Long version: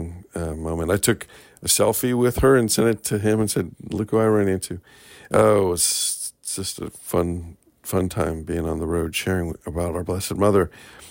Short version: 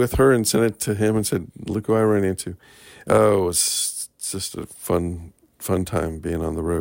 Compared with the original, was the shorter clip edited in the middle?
no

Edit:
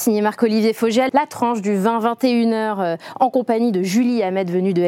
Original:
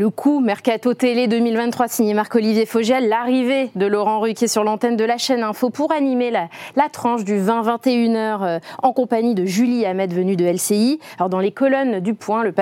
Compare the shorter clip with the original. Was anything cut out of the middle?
yes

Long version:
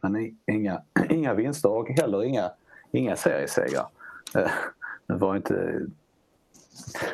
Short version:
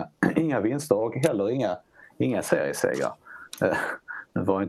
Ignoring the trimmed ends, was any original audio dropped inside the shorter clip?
no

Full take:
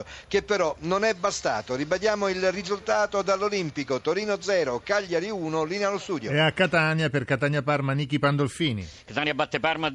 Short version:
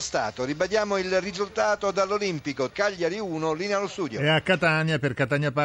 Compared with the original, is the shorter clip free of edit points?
no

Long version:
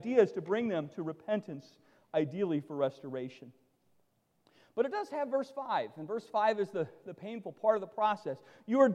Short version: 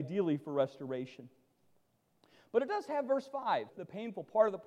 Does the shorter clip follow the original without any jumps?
no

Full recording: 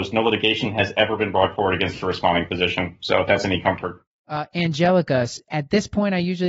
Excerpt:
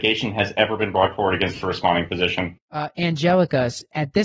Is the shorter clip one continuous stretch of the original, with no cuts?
no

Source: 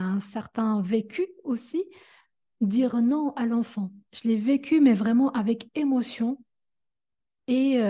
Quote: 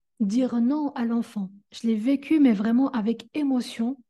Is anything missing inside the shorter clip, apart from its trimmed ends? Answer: no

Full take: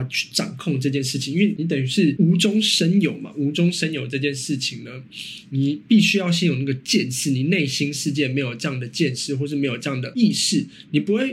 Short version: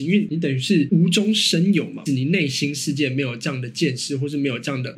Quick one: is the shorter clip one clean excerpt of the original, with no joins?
no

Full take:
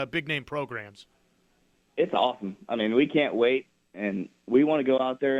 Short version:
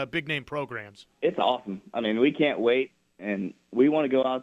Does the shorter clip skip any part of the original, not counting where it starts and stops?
yes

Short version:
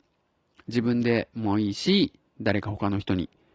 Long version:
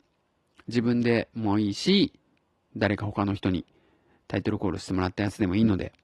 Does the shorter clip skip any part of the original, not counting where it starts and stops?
yes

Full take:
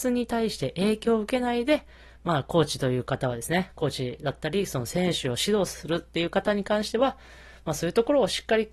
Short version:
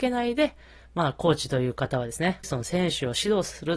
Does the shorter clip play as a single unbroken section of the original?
no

